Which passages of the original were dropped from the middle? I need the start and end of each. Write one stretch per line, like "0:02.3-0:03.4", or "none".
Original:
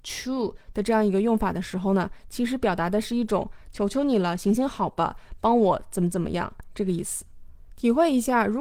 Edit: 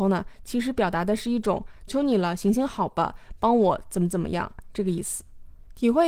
0:03.7-0:03.9